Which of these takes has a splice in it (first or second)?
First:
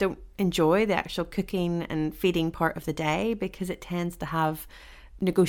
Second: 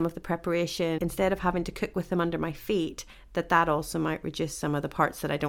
second